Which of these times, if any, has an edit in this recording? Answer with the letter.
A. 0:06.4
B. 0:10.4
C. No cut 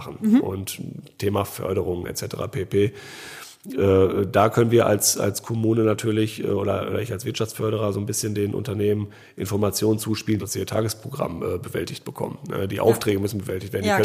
B